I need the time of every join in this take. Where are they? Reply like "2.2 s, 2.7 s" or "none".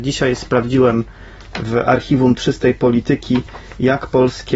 none